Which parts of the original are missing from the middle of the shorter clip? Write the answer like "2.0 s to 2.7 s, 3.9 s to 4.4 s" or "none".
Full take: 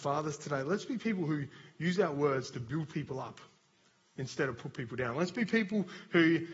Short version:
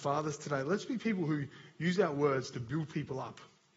none